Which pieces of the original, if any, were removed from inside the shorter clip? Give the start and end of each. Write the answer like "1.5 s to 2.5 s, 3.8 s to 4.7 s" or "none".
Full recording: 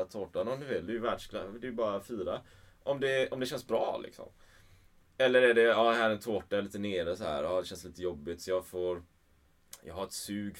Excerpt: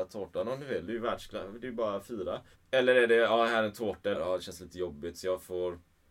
2.5 s to 5.0 s, 6.6 s to 7.4 s

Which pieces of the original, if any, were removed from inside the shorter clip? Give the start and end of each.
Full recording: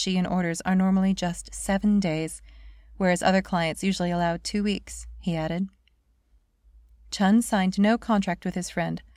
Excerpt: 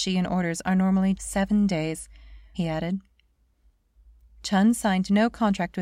1.2 s to 1.5 s, 2.9 s to 5.2 s

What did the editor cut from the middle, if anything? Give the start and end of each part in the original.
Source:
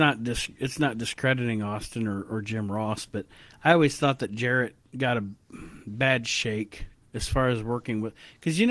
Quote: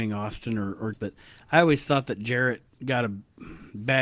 2.4 s to 3.1 s

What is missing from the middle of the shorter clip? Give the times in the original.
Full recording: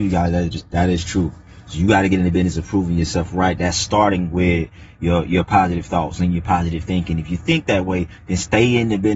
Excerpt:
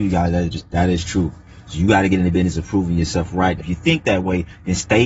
3.6 s to 7.2 s

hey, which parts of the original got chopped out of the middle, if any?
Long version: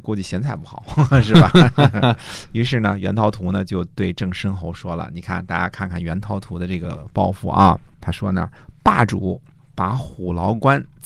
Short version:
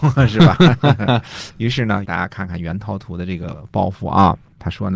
3.0 s to 5.5 s

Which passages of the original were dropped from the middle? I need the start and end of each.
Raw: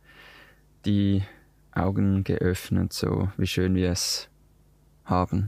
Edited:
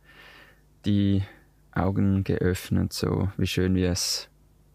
none

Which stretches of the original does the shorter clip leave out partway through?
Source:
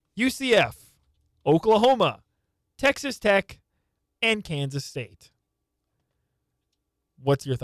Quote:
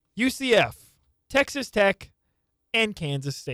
1.1 s to 2.6 s

